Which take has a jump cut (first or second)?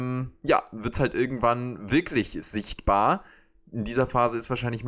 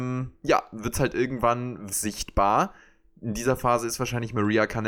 second